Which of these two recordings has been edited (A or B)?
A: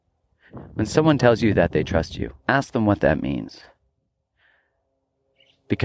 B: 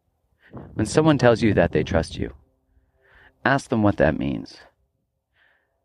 A